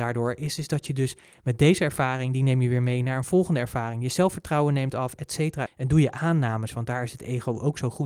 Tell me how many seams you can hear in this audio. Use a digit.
1